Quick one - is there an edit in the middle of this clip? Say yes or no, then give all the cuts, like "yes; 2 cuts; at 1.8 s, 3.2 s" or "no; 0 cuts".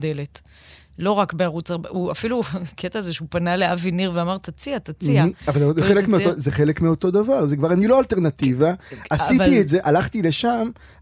no; 0 cuts